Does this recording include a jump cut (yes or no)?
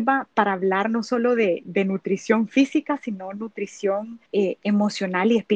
yes